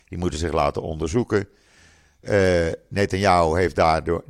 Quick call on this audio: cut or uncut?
uncut